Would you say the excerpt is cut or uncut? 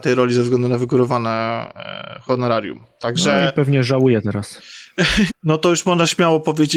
cut